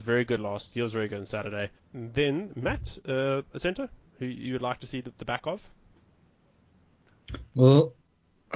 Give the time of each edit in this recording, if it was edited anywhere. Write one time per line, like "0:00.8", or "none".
0:01.8